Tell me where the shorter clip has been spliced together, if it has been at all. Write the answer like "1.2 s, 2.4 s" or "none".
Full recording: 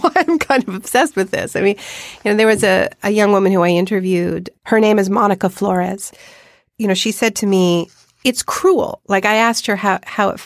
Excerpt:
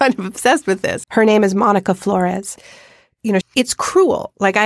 1.0 s, 3.4 s